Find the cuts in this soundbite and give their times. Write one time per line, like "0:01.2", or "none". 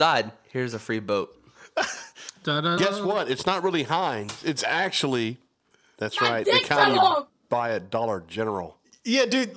0:02.8